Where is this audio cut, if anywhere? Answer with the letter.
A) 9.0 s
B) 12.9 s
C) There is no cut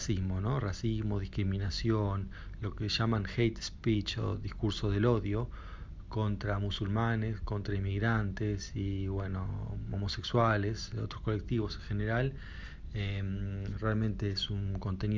C